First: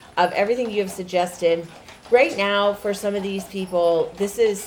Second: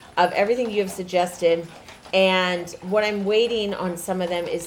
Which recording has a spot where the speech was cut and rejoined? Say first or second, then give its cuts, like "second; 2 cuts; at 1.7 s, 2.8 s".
second; 1 cut; at 2.1 s